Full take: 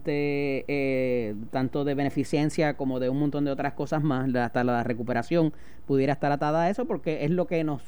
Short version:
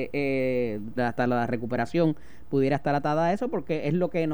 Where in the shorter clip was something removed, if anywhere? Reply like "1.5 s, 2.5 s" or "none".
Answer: 1.0 s